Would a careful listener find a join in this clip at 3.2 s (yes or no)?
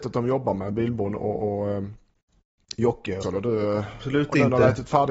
yes